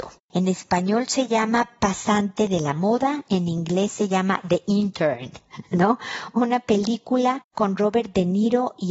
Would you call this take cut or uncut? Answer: uncut